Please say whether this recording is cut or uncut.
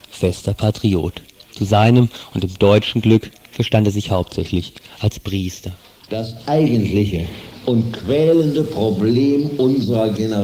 uncut